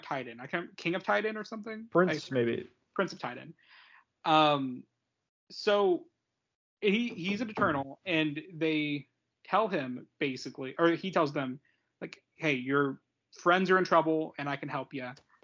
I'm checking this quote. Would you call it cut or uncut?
uncut